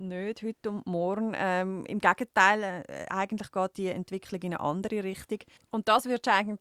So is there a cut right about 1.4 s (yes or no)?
no